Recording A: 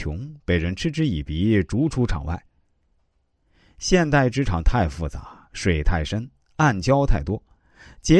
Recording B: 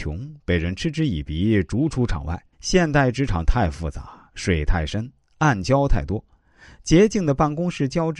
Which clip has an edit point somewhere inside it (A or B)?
B